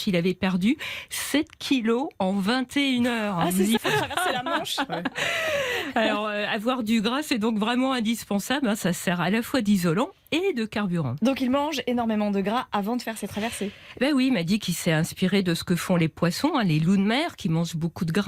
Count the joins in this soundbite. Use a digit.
1